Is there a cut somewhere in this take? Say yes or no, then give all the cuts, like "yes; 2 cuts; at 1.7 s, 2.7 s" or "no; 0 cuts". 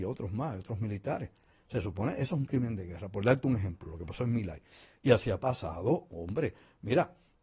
no; 0 cuts